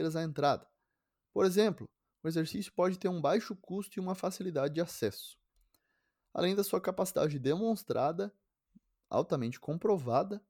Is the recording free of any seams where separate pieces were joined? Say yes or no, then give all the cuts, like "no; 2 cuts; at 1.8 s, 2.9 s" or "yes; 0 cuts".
yes; 0 cuts